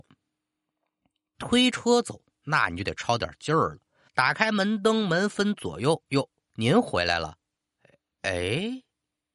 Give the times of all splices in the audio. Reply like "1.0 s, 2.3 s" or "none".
4.1 s, 6.4 s